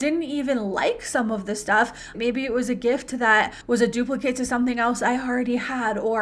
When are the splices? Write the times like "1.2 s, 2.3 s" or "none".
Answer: 2.1 s